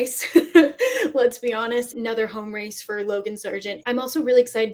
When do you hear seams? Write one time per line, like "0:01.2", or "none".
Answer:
0:01.9
0:03.8